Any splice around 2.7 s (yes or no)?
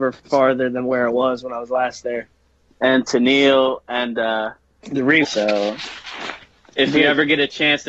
yes